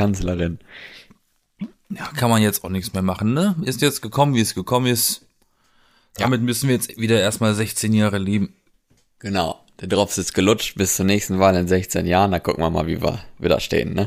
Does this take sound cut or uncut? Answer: uncut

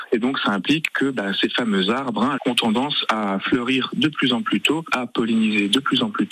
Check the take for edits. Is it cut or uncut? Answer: cut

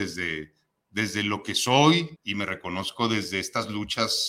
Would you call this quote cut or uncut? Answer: cut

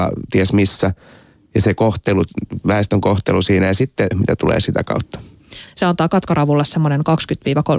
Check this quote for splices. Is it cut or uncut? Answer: cut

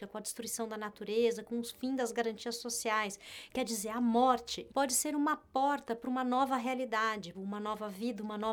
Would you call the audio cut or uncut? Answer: cut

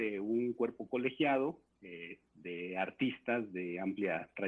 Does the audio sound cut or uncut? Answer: cut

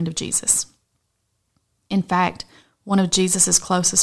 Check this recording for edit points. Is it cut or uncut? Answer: uncut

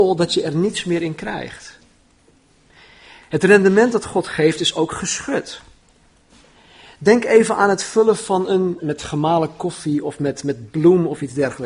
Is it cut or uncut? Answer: cut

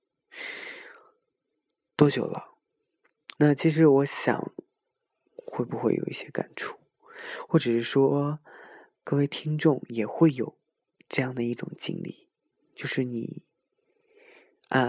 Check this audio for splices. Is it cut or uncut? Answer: cut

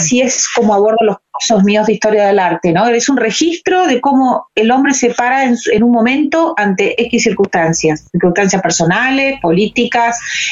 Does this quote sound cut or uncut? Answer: uncut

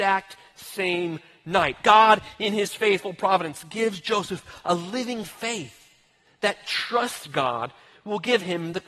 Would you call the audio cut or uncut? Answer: uncut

